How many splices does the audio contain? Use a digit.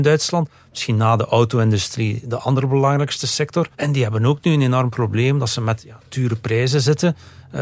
1